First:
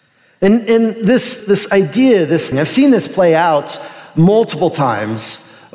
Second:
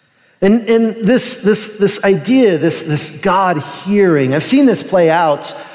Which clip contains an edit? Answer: first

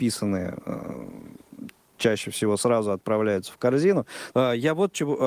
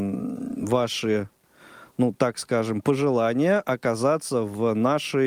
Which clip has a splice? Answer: first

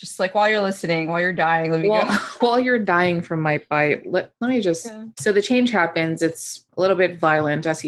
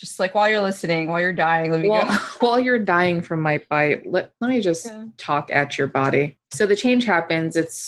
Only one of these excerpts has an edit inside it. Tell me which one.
first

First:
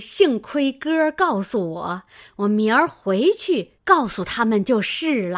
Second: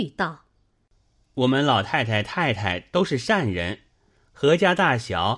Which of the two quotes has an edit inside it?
first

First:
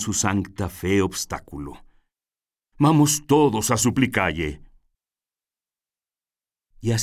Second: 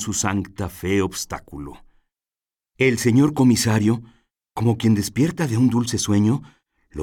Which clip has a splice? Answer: second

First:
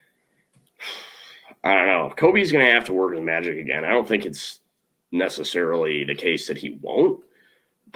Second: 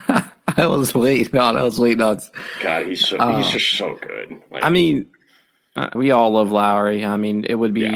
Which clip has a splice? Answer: second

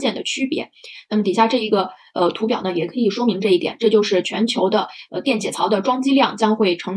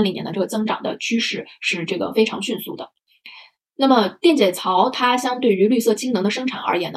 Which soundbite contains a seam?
first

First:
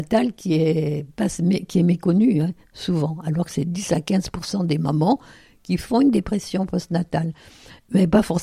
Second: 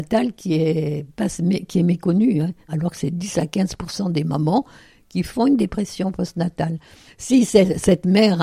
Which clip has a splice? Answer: second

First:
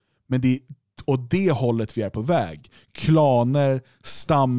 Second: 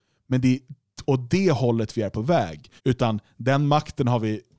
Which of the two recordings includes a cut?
second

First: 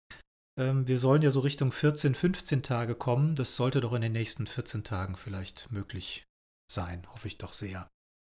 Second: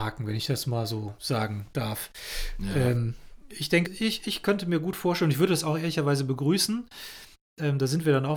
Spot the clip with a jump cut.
second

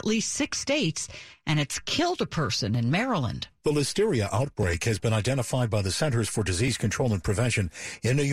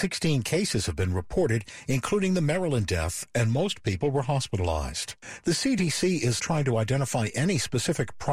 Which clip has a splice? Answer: second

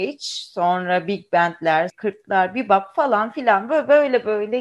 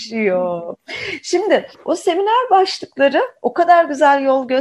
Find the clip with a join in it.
first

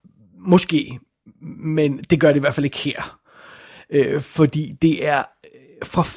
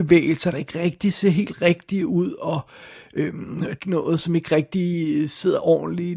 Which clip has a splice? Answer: second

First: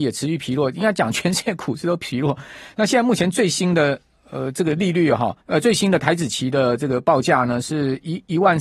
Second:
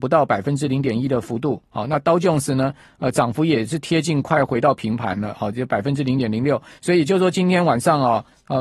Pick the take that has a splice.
second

